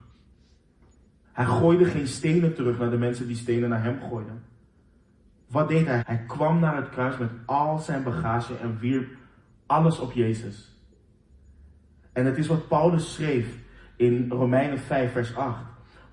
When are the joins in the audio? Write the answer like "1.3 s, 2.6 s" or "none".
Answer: 1.2 s, 6.0 s